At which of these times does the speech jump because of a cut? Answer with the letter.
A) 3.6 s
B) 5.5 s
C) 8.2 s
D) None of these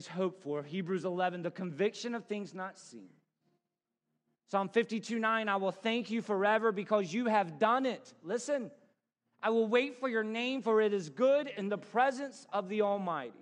D